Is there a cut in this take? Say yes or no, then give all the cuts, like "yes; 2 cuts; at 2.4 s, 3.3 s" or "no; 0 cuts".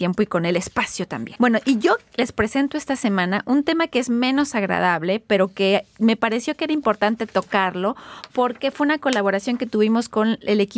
yes; 1 cut; at 1.4 s